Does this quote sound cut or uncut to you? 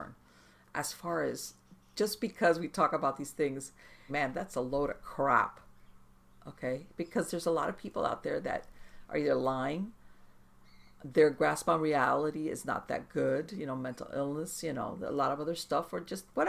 cut